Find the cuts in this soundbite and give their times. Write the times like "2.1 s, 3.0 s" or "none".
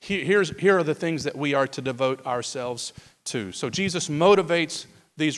none